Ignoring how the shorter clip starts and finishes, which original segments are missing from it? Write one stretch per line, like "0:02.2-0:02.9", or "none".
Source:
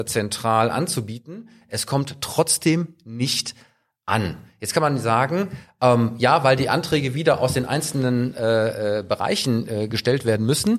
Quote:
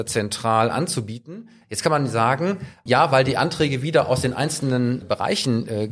0:01.6-0:04.5
0:05.8-0:06.2
0:08.3-0:09.0